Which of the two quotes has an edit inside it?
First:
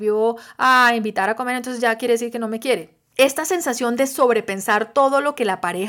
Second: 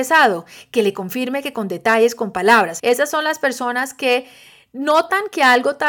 second; 1 cut; at 2.8 s

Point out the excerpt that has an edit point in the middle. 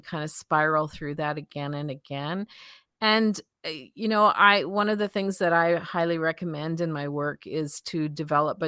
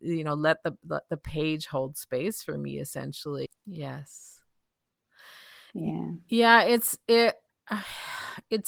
second; 1 cut; at 3.5 s

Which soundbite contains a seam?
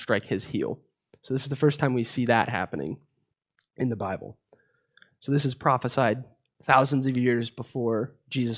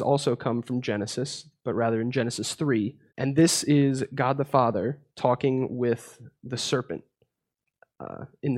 second; 2 cuts; at 3.1 s, 5.1 s

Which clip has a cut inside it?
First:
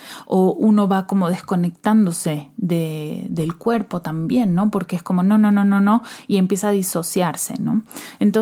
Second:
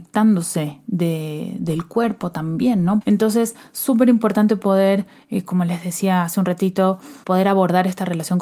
second; 2 cuts; at 3.0 s, 7.2 s

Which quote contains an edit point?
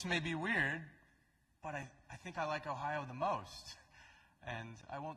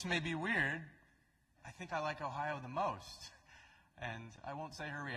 second; 1 cut; at 1.6 s

